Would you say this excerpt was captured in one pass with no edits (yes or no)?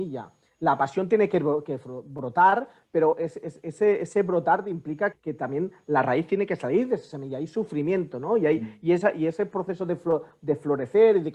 no